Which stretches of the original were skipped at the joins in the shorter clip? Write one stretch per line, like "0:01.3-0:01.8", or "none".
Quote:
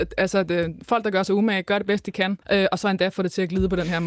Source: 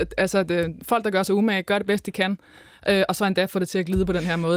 0:02.4-0:02.8